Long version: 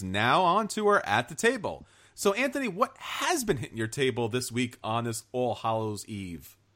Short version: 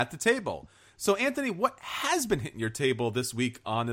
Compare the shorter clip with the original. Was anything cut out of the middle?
no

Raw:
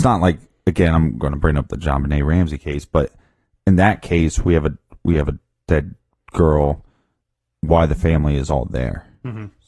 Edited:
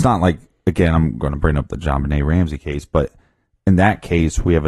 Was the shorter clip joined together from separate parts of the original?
no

